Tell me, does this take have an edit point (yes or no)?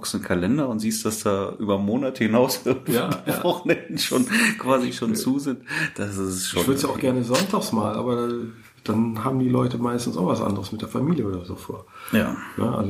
no